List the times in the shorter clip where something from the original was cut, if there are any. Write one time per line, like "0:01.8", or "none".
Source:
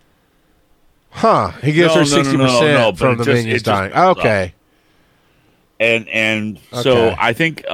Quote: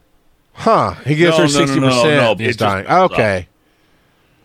0:02.4